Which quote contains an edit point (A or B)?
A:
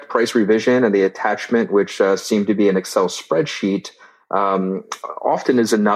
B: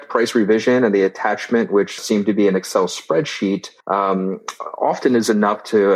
B